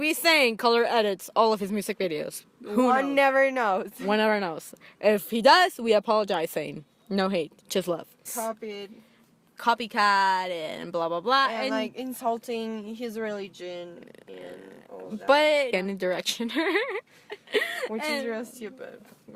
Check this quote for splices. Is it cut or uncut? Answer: cut